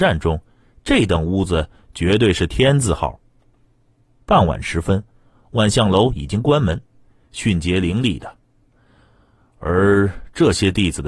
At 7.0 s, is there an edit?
yes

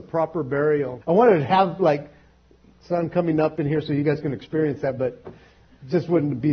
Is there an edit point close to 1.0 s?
yes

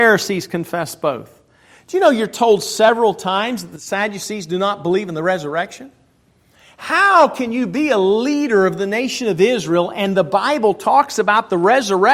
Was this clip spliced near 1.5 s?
no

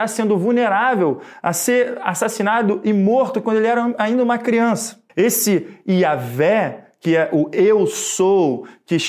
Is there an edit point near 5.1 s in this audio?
yes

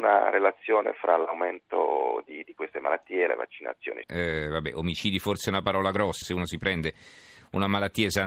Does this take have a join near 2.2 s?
no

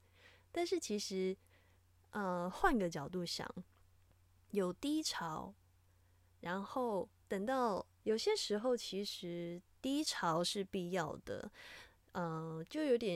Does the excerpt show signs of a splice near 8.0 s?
yes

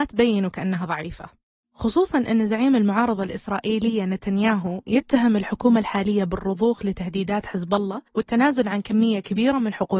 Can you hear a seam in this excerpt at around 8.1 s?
yes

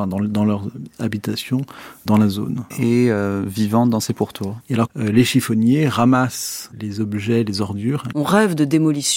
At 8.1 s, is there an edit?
yes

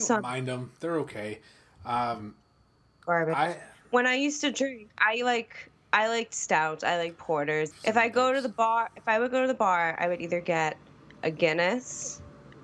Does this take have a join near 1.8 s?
no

